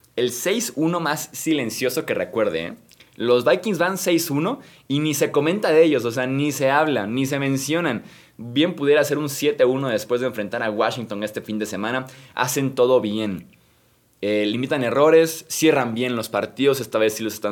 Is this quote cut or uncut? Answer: uncut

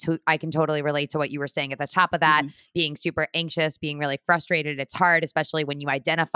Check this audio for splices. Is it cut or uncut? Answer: uncut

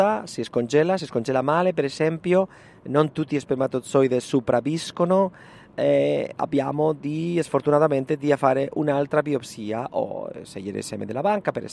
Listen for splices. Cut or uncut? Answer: uncut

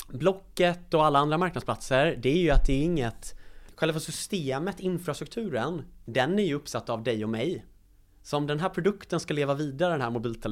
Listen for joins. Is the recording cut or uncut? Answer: uncut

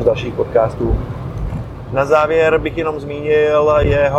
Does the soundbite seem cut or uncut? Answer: uncut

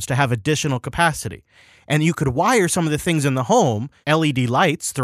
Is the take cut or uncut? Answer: cut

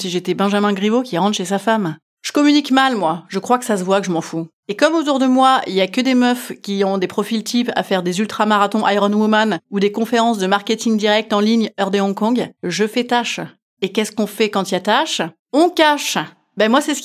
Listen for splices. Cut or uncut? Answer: uncut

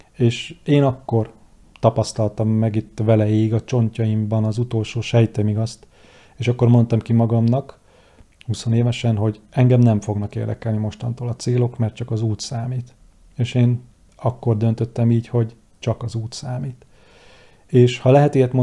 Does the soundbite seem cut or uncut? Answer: uncut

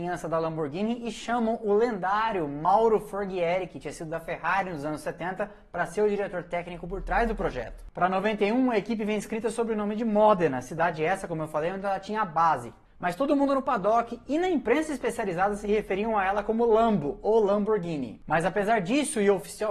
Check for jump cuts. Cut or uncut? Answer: uncut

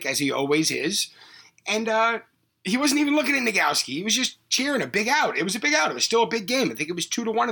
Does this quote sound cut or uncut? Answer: uncut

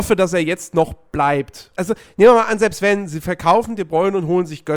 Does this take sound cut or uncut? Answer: cut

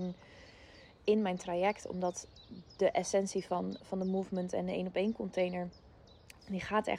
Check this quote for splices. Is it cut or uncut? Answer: cut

